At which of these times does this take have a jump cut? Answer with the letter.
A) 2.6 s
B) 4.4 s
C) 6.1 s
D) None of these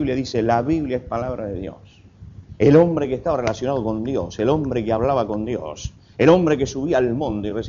A